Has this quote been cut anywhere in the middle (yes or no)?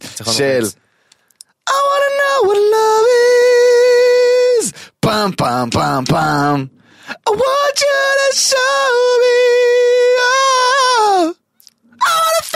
no